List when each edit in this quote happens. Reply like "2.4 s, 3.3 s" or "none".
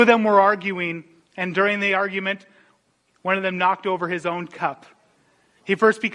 none